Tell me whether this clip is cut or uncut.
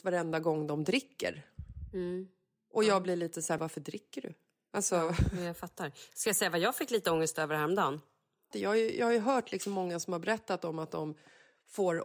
cut